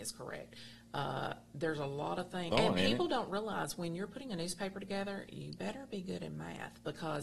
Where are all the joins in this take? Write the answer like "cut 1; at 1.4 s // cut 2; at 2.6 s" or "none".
cut 1; at 2.5 s